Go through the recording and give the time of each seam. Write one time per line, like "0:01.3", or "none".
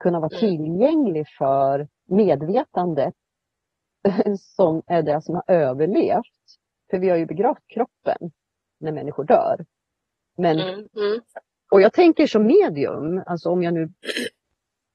0:02.0
0:10.9